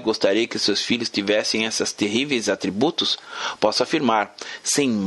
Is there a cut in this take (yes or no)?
no